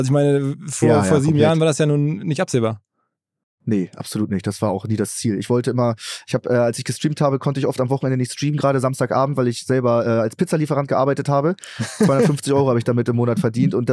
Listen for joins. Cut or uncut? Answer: uncut